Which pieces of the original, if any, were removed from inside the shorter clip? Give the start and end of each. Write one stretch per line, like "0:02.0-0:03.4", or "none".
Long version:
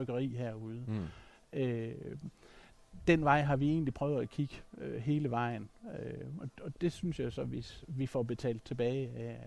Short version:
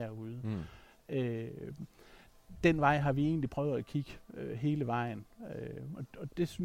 none